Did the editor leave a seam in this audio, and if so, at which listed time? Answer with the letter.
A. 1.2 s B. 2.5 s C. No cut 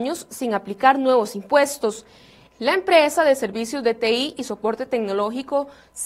B